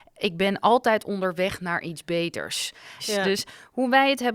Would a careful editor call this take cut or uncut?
cut